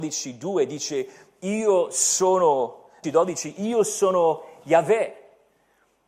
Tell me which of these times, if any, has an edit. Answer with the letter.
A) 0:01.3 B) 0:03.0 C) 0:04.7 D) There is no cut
B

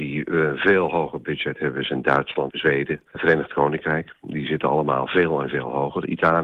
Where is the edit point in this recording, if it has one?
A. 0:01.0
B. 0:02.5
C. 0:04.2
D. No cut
B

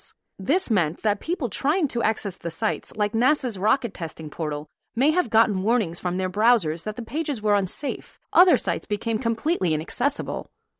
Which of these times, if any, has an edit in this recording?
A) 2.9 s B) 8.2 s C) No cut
B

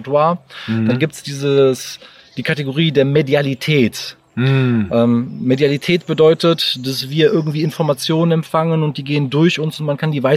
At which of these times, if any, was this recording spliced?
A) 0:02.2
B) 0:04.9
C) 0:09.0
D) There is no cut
D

